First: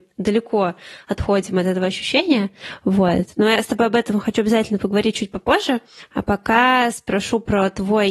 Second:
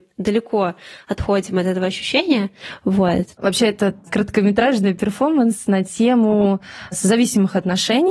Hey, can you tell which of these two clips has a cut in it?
second; 1 cut; at 3.3 s

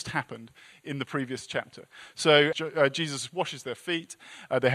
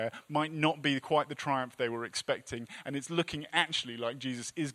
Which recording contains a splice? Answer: first; 1 cut; at 2.5 s

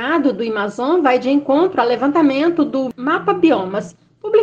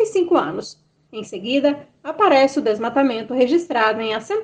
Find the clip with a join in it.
second; 1 cut; at 1.1 s

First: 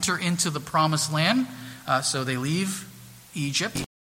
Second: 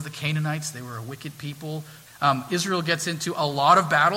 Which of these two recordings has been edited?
second; 1 cut; at 2.1 s

